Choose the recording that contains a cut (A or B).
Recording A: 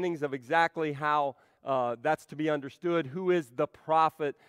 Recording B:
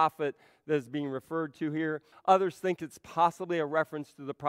B